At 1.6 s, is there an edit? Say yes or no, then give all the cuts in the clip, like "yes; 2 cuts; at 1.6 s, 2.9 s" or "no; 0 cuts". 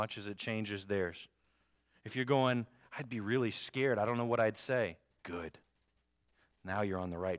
no; 1 cut; at 5.2 s